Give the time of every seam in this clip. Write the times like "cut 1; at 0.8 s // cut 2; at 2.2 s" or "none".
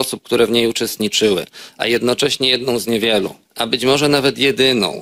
cut 1; at 3.4 s